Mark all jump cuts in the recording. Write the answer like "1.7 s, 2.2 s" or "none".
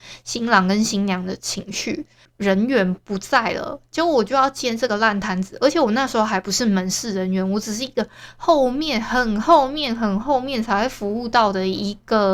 2.3 s

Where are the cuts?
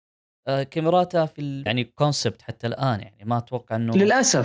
1.7 s

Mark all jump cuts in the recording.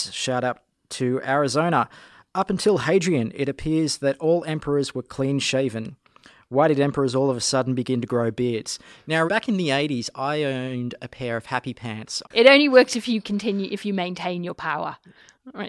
9.3 s, 12.2 s

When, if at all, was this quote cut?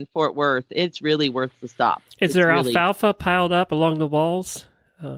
none

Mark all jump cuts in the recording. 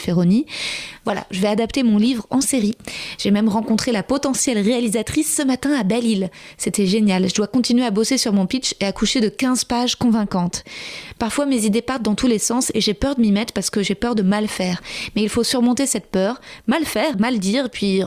17.1 s

